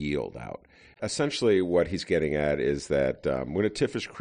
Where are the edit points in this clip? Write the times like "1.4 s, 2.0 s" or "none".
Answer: 0.9 s